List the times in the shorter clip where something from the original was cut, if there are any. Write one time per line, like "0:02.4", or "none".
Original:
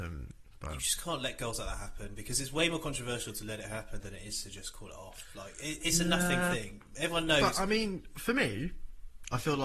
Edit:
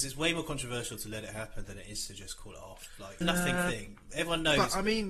0:03.2